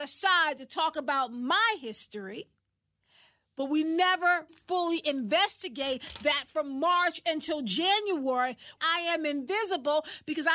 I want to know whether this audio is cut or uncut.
cut